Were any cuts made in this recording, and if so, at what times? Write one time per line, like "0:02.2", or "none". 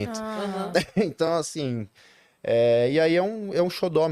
none